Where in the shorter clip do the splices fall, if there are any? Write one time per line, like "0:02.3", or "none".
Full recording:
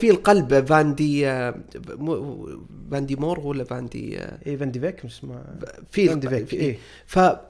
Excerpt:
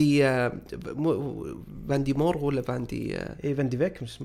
none